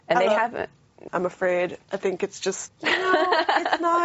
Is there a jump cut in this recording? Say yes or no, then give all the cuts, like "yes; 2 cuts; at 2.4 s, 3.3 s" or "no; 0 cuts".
yes; 2 cuts; at 1.1 s, 2.7 s